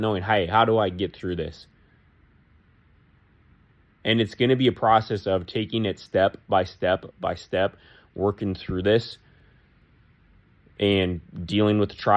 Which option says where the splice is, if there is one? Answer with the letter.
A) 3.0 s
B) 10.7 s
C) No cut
C